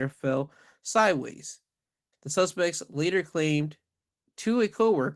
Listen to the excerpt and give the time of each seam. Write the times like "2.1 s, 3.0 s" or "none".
2.1 s